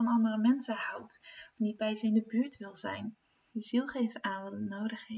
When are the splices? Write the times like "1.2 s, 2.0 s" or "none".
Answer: 3.5 s